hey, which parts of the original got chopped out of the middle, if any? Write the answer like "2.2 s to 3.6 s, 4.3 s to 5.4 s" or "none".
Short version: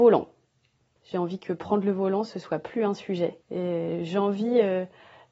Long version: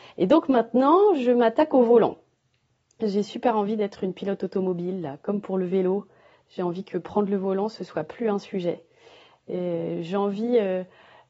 2.9 s to 6.4 s, 8.9 s to 9.4 s